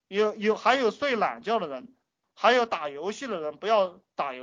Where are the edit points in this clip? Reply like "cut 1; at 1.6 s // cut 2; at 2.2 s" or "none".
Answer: cut 1; at 2.2 s